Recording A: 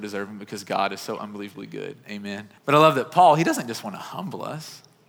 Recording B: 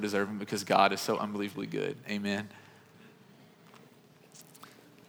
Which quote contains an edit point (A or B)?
A